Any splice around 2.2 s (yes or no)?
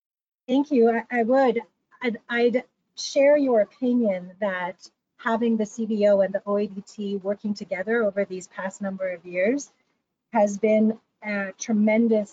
no